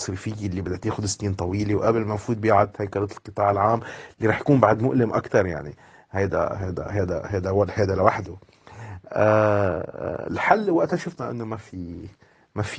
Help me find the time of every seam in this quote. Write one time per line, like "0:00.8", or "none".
none